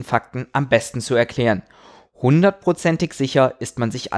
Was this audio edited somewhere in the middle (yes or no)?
no